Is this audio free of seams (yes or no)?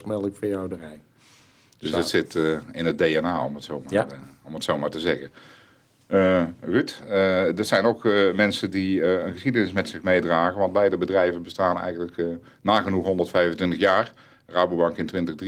yes